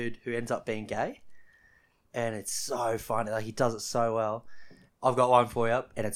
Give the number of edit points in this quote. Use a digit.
1